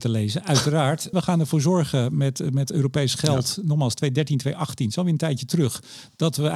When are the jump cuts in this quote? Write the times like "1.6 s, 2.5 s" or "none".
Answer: 1.1 s